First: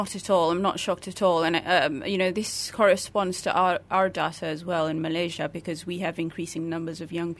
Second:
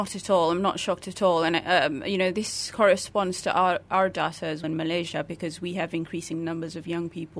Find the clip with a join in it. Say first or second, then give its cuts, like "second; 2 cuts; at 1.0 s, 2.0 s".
second; 1 cut; at 4.6 s